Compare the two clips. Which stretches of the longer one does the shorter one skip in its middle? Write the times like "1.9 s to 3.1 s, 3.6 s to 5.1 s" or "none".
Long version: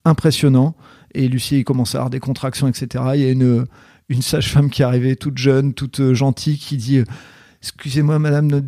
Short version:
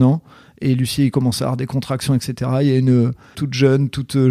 3.9 s to 5.2 s